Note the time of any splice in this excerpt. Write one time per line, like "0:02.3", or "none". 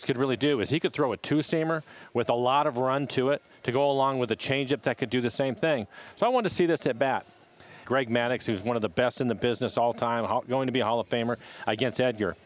0:07.9